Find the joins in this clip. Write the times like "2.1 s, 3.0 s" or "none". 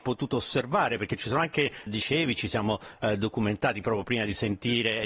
1.9 s